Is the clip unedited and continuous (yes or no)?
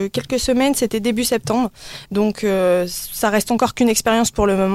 yes